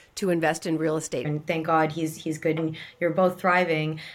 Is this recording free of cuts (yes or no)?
no